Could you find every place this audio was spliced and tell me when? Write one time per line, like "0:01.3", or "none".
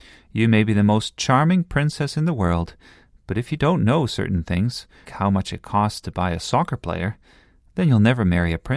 0:05.0